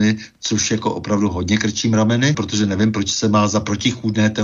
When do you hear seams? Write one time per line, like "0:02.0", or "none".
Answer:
0:02.3